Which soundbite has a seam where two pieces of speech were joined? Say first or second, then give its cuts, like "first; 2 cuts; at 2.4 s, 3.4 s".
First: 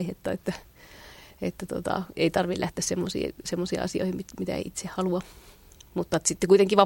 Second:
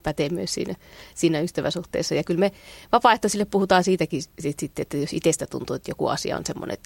first; 1 cut; at 2.1 s